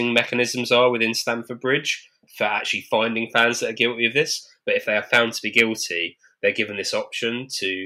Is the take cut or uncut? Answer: cut